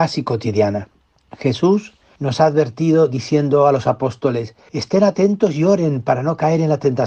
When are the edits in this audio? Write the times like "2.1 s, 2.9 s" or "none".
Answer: none